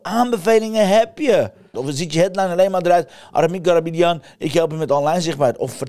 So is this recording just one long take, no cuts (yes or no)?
no